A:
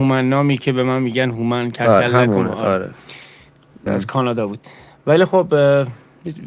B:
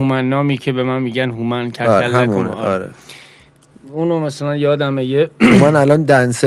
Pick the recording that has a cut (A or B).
A